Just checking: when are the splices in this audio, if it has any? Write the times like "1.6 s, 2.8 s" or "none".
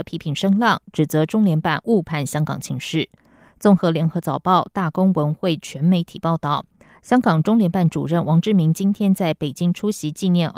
none

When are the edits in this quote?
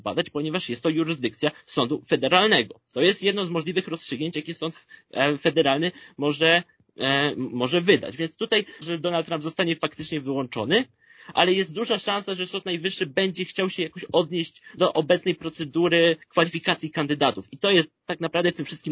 8.8 s, 14.8 s

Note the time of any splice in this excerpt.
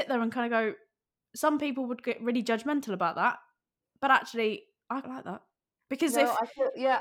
5.0 s

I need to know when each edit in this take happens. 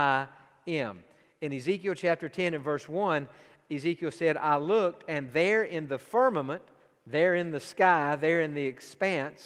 none

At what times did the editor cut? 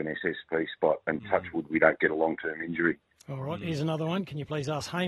none

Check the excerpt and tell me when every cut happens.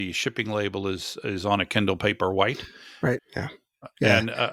3.2 s

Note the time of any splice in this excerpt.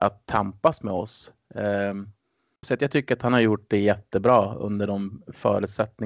2.6 s

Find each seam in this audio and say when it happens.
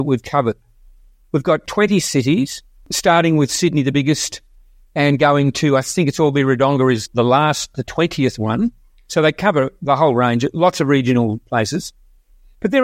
none

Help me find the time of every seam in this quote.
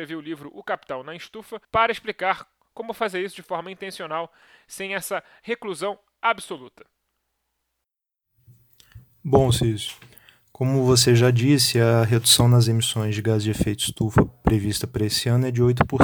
1.6 s

